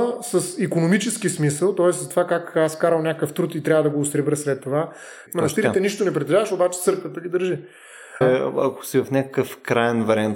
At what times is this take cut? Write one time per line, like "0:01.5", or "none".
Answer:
0:05.3
0:08.2